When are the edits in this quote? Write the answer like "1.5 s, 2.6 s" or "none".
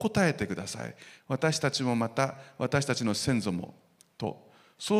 1.2 s